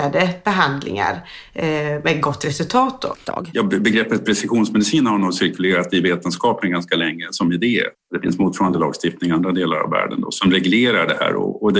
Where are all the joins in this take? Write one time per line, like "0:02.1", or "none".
0:03.2
0:07.9